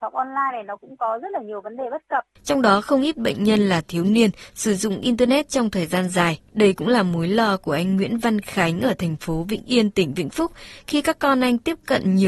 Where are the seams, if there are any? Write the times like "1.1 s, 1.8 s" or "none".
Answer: 2.4 s, 6.5 s